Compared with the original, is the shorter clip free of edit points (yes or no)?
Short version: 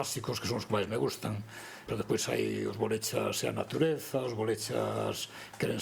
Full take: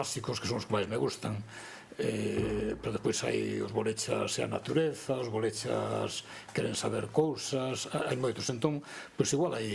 no